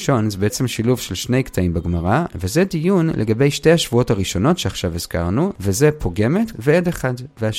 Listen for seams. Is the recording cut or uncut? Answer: cut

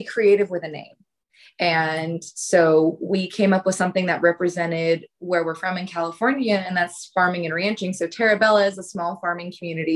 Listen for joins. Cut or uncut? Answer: uncut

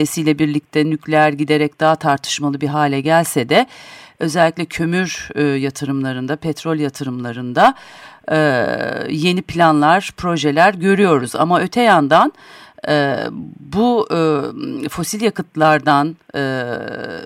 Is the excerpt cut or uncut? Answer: uncut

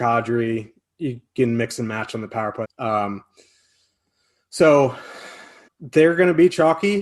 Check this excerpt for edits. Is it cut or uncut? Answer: cut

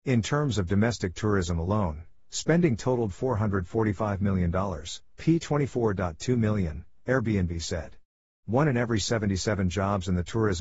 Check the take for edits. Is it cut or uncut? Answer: uncut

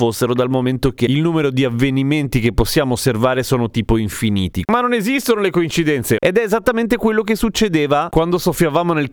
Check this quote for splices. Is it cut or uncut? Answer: cut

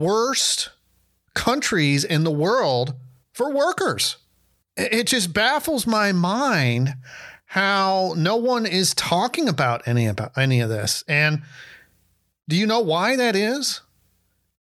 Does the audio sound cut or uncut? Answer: cut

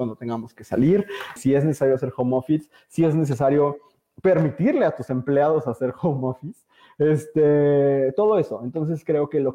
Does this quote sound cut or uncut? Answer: cut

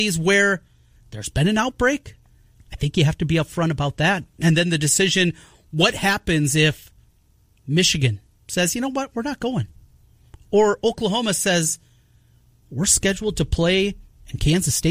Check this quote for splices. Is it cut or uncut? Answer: uncut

